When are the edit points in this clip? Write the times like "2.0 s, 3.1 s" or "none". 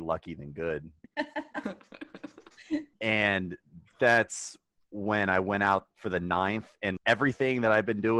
1.0 s, 2.9 s, 7.0 s